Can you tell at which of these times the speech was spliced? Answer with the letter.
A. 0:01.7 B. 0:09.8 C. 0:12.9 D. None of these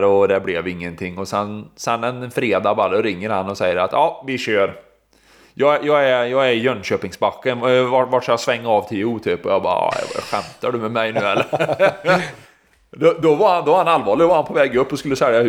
D